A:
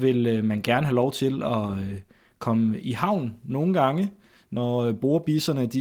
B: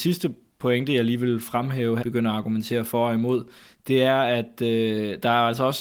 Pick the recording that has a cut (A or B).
B